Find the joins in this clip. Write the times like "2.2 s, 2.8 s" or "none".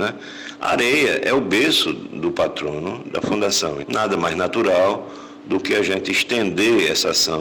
3.8 s